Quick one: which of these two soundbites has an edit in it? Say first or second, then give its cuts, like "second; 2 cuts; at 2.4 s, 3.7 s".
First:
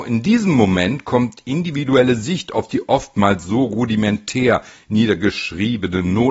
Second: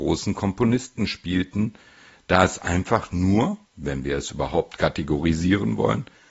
second; 1 cut; at 3.6 s